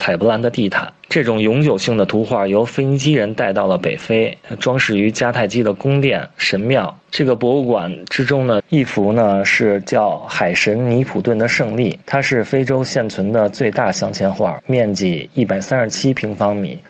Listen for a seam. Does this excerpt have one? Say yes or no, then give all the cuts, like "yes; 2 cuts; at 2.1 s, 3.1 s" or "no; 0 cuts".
yes; 2 cuts; at 7.1 s, 8.6 s